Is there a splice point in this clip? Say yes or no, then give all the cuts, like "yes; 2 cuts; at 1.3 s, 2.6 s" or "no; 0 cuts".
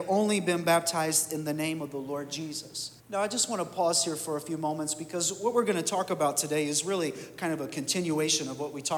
yes; 1 cut; at 3.0 s